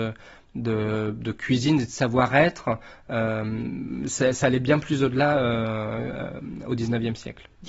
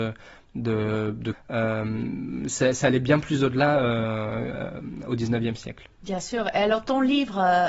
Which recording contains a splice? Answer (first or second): second